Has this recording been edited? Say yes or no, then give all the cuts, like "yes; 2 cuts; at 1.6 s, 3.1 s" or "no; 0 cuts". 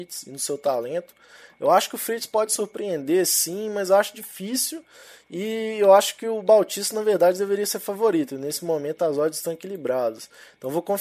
no; 0 cuts